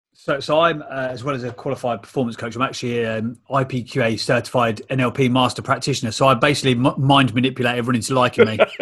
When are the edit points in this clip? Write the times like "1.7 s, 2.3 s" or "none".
none